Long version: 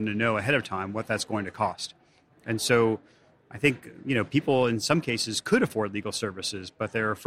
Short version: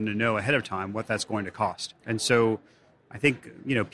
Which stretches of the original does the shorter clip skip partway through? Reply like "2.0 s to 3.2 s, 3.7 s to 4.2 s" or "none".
2.0 s to 2.4 s